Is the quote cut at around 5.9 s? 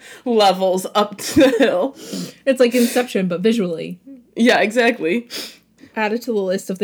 yes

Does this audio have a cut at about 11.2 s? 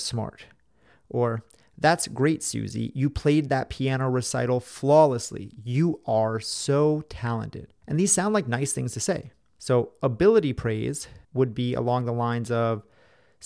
yes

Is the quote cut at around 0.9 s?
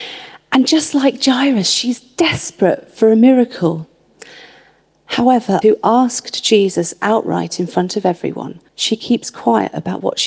no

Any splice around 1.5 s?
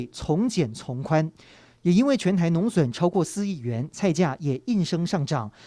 no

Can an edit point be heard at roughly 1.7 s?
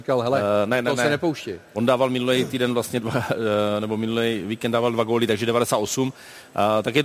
no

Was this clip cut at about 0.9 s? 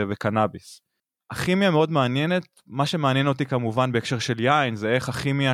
no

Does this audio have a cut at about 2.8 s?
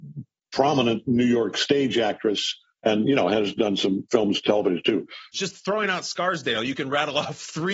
no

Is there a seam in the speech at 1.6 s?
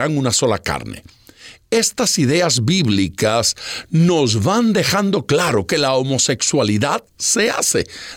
no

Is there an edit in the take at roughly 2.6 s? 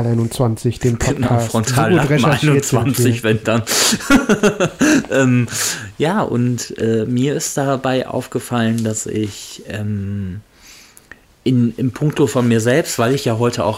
no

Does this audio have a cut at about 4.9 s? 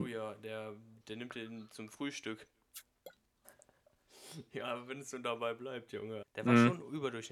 no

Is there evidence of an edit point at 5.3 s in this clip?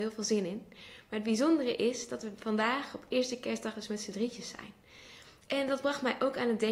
no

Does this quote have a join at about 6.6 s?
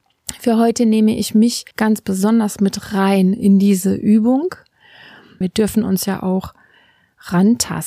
no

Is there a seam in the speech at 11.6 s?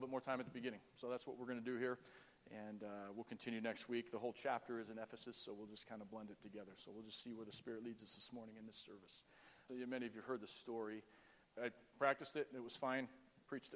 yes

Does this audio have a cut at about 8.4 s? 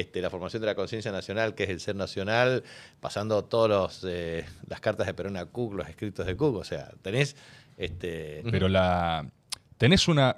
yes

